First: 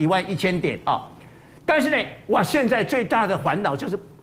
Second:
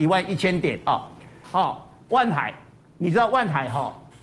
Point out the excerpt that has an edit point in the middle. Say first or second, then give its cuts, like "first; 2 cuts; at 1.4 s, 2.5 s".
second; 1 cut; at 1.4 s